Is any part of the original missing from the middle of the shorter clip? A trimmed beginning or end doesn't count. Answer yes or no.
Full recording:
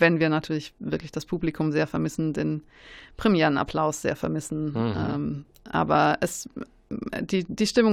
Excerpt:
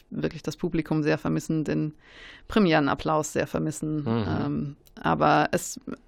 no